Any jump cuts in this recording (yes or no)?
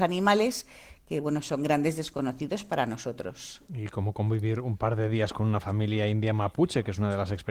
no